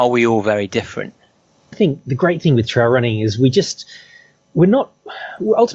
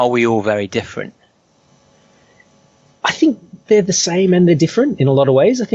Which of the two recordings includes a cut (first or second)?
first